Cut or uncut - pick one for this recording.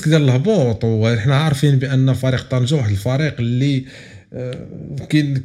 uncut